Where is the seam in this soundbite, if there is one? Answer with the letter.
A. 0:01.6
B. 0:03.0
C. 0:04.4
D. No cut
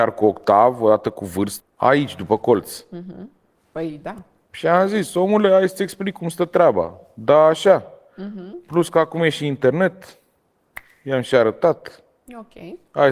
A